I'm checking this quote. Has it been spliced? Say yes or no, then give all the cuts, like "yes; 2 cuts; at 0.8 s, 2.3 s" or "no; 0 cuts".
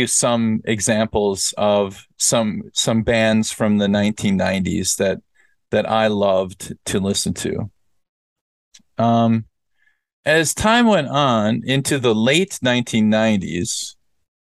no; 0 cuts